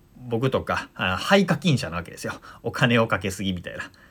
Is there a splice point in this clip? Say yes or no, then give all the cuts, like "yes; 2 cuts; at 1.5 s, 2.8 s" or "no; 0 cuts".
no; 0 cuts